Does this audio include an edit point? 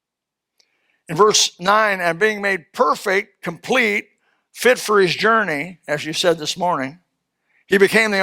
no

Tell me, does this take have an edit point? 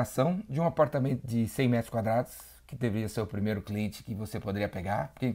no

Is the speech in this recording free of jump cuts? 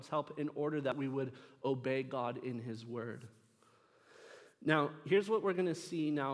yes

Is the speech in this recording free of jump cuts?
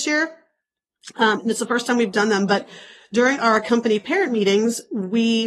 yes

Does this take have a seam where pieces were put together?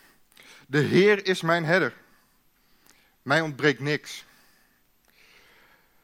no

